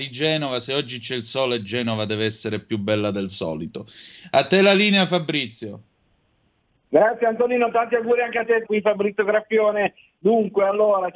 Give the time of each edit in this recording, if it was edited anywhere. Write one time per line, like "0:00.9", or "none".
0:08.6